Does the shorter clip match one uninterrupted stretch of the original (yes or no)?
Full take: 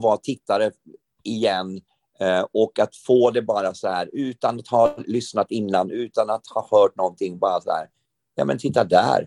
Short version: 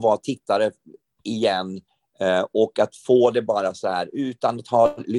yes